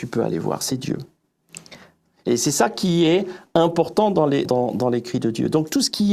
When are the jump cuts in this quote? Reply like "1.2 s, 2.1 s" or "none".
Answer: 4.5 s